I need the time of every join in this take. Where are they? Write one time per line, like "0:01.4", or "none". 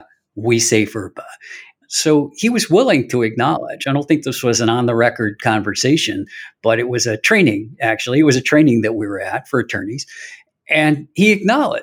0:01.8